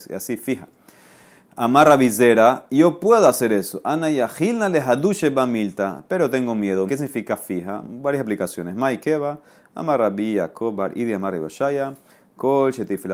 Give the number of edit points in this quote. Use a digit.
1